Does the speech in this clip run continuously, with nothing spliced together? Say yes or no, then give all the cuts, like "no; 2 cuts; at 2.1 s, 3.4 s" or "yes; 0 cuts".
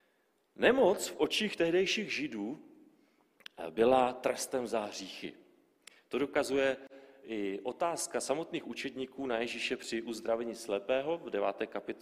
yes; 0 cuts